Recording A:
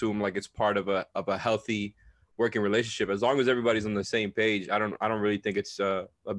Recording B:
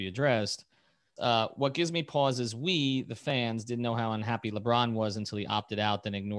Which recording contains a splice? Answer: B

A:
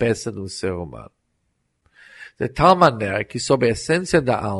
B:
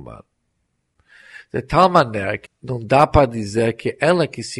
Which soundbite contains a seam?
B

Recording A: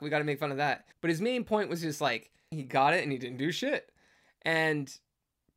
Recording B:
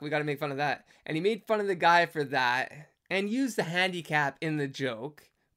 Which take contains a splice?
A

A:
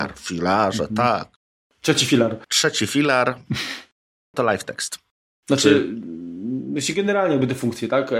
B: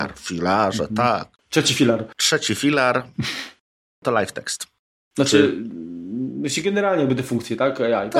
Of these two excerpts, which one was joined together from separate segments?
B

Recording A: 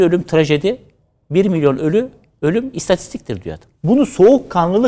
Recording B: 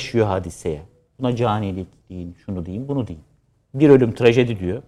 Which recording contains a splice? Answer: A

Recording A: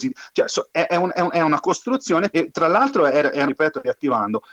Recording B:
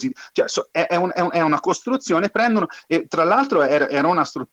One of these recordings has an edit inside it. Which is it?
A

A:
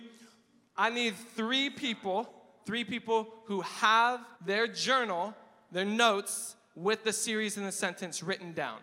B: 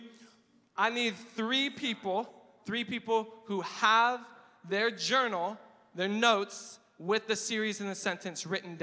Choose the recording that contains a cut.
A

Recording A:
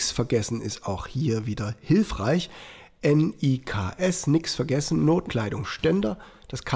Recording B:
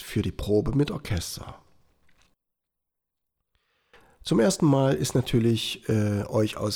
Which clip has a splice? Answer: A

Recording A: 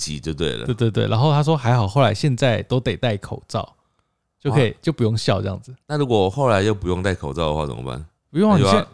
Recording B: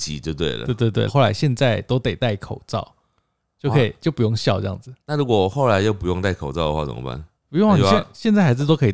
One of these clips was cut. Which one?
B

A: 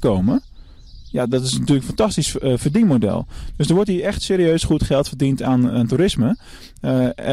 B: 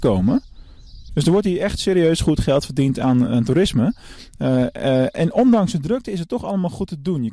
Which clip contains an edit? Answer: B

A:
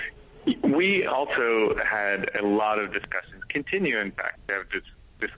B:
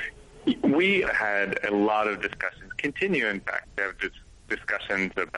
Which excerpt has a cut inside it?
B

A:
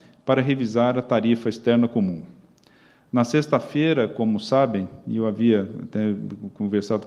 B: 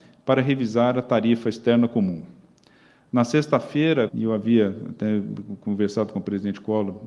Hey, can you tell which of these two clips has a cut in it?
B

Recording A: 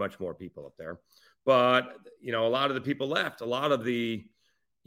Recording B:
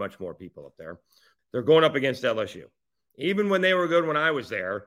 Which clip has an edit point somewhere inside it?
B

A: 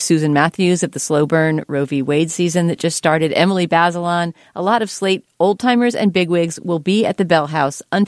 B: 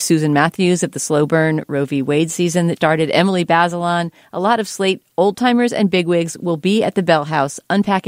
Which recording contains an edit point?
B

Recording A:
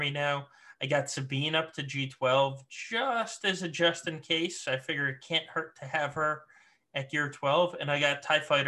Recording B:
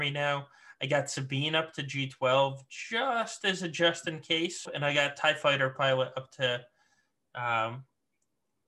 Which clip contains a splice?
B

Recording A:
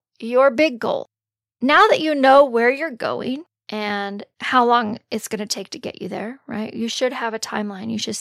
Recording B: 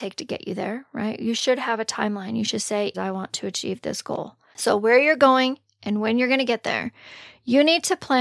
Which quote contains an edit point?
B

